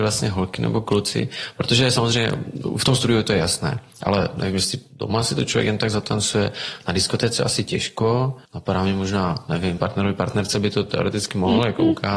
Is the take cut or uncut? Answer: cut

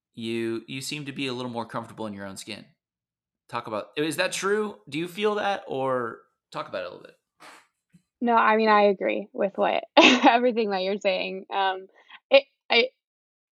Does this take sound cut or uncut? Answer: uncut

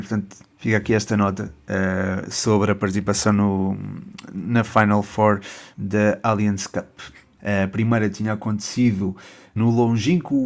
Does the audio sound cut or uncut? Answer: cut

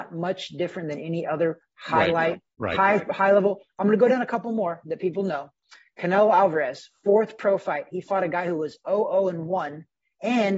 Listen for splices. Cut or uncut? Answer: uncut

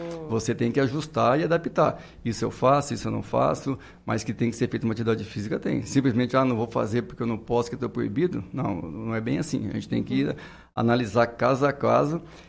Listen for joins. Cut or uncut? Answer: uncut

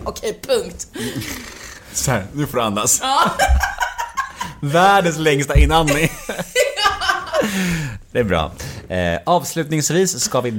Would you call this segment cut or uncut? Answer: uncut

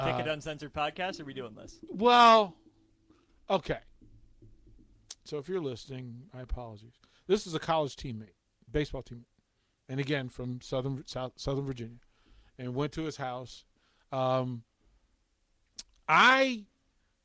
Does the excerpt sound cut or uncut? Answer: cut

